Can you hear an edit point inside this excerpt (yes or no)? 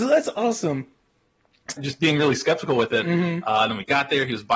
yes